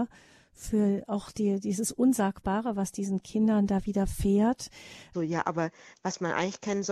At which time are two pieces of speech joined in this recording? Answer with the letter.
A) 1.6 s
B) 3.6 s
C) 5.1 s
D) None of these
C